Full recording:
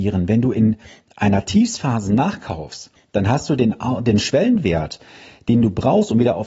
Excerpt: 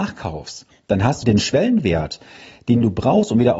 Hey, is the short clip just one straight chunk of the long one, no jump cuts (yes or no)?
no